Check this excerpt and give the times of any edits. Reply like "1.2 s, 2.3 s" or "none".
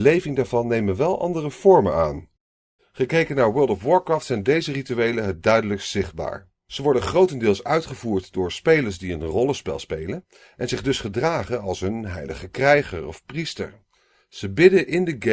2.8 s